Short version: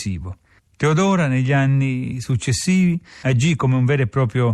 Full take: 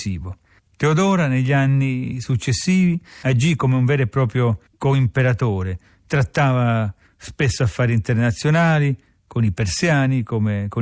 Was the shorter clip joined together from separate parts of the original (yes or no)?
no